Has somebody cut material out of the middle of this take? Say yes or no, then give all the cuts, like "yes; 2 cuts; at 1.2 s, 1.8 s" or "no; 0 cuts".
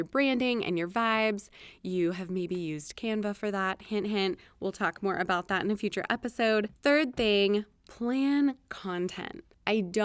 no; 0 cuts